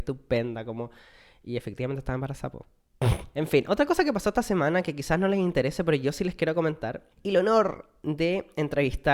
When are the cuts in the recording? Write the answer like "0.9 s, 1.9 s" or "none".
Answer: 3.3 s, 7.1 s

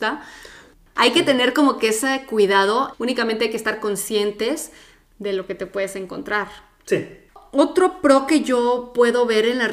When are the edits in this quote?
2.9 s

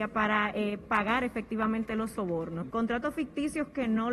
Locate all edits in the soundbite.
2.7 s

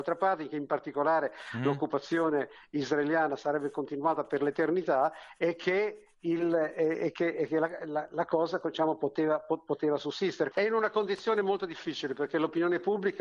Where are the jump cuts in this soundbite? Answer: 10.5 s

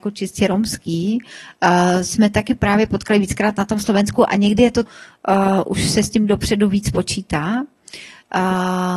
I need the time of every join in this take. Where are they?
4.9 s

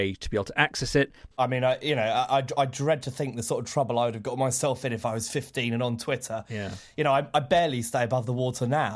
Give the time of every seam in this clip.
1.3 s

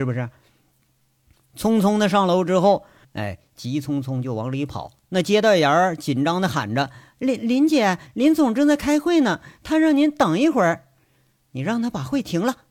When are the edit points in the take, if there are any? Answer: 3.0 s

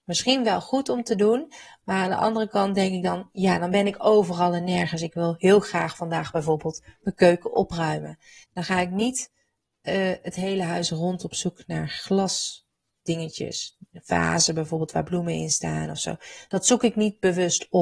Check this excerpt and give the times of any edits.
8.4 s

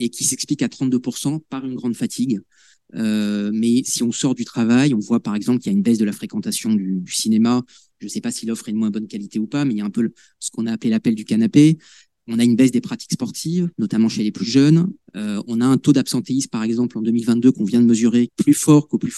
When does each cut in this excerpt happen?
15.1 s, 18.3 s

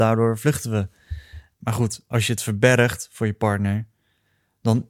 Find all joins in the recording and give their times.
1.5 s

